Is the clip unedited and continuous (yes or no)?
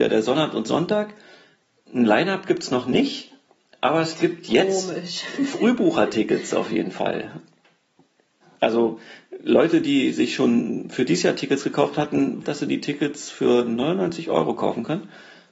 no